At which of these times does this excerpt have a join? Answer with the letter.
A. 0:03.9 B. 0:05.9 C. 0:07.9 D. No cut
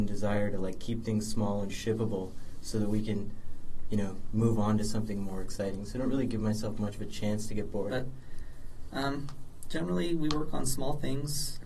C